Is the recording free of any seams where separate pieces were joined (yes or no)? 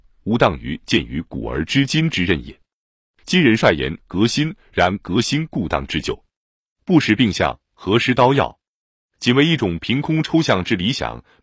yes